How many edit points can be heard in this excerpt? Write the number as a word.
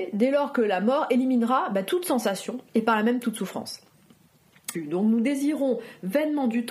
one